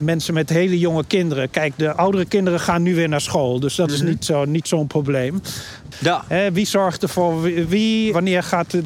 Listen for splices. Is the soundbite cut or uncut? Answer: cut